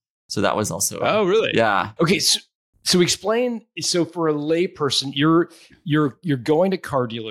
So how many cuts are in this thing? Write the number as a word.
one